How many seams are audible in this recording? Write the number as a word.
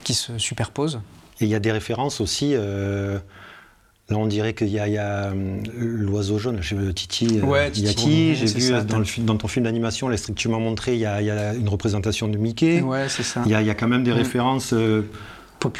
one